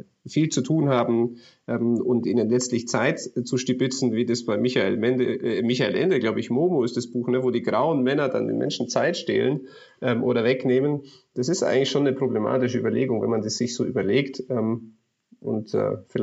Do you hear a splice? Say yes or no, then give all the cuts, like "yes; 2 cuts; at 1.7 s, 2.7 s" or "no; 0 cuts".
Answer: no; 0 cuts